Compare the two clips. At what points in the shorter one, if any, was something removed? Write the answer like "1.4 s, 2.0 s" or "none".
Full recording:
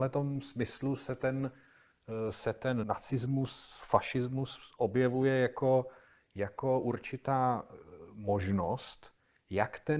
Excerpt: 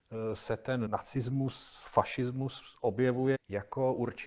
3.3 s